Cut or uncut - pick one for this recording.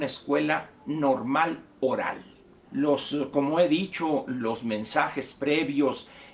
cut